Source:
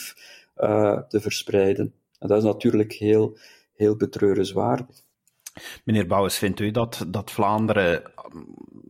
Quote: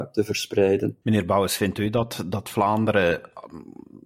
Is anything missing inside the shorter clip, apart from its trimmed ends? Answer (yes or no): yes